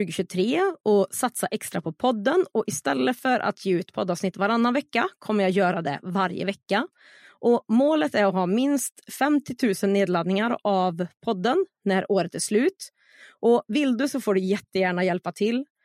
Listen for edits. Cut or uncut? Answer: uncut